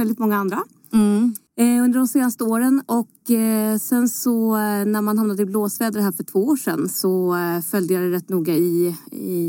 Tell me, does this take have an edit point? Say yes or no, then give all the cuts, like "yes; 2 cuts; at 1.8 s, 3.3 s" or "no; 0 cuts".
yes; 1 cut; at 1.5 s